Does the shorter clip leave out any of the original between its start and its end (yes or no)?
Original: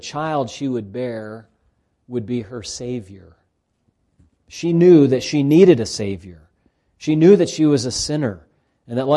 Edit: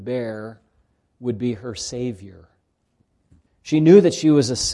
yes